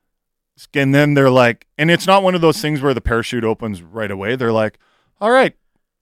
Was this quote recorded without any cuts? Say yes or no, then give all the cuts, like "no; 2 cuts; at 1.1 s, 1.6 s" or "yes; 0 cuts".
yes; 0 cuts